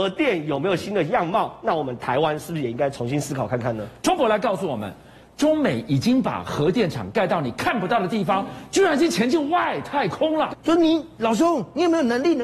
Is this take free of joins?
no; 2 cuts; at 4.0 s, 10.5 s

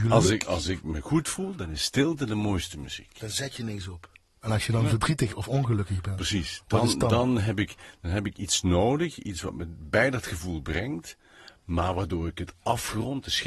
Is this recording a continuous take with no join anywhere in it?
yes; 0 cuts

